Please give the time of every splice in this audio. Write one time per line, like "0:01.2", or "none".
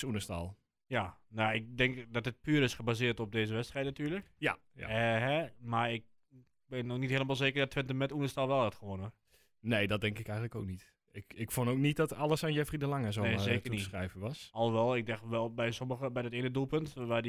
none

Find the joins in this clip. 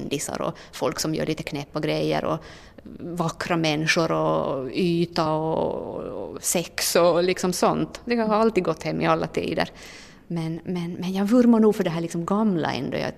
none

